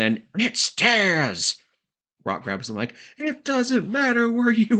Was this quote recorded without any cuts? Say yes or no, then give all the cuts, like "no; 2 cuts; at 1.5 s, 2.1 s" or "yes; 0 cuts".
no; 1 cut; at 2.2 s